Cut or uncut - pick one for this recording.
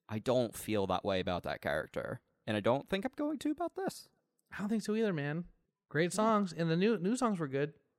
uncut